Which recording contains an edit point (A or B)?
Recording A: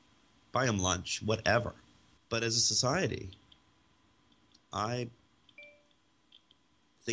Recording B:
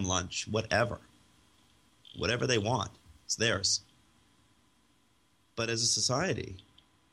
A